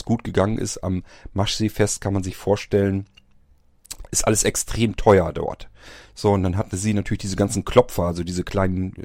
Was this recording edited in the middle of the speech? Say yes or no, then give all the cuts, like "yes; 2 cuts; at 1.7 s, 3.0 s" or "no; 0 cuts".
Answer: no; 0 cuts